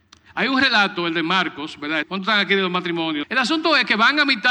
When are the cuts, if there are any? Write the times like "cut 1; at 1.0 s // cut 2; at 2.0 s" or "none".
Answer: cut 1; at 2.0 s // cut 2; at 3.2 s